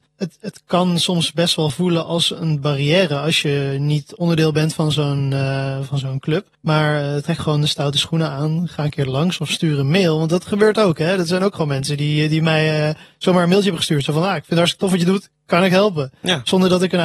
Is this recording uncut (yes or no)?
no